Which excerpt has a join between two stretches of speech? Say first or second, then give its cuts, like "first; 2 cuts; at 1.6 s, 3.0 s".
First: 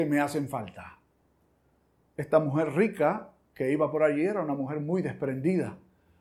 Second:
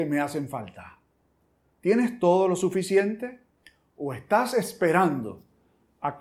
second; 1 cut; at 1.7 s